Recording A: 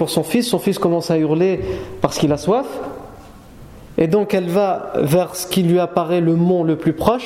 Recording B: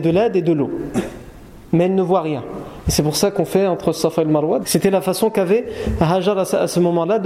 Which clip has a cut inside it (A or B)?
B